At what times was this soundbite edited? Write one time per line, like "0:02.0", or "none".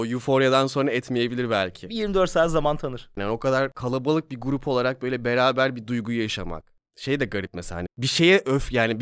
0:03.2
0:07.9

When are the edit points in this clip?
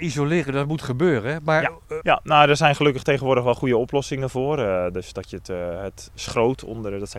0:02.0

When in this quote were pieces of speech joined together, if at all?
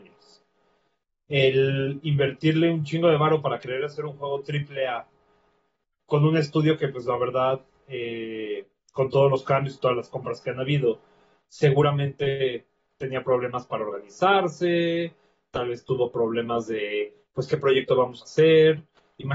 none

